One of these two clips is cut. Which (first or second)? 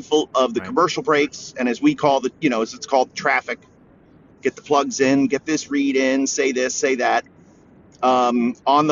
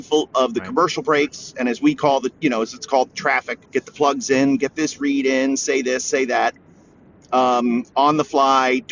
second